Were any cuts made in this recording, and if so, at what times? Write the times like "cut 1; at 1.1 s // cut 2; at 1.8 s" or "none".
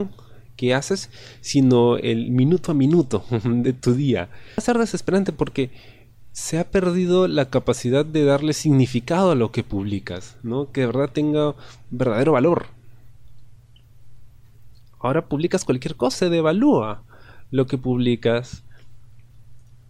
cut 1; at 16.1 s